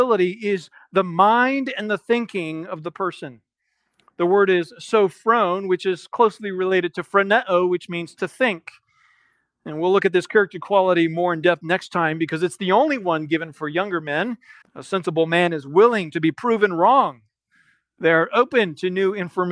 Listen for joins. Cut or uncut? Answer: cut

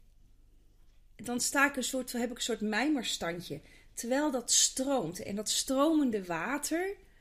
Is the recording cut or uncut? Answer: uncut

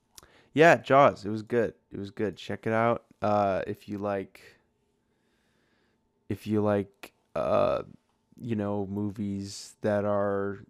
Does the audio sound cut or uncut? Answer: uncut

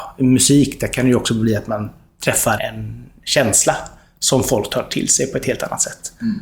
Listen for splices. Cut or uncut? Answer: cut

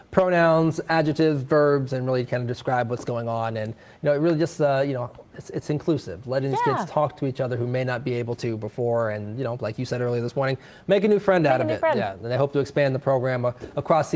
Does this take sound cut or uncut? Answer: uncut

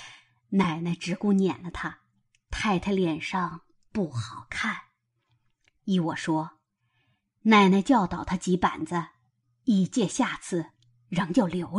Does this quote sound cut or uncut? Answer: uncut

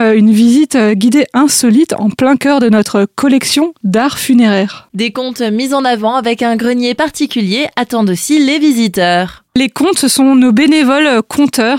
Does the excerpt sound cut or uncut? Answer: uncut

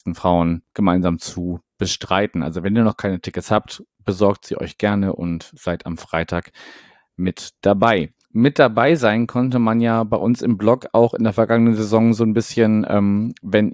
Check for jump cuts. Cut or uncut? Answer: uncut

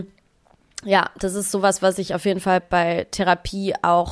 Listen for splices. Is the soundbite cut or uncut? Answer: cut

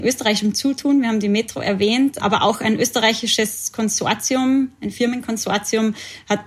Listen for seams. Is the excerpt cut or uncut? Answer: uncut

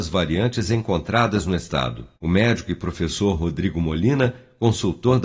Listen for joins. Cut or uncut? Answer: cut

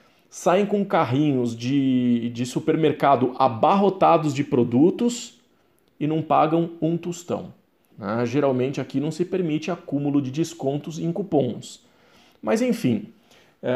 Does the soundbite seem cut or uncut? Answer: cut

